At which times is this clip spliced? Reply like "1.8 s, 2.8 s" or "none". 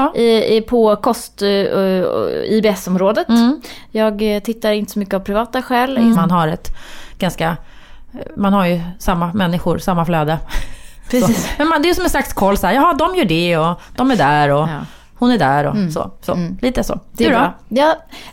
6.1 s